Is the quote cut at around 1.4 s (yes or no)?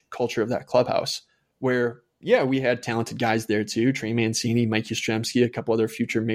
no